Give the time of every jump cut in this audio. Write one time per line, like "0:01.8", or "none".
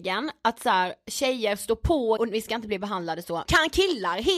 0:02.2
0:03.4